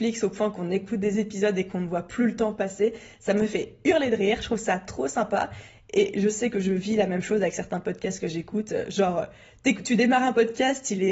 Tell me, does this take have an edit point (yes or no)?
no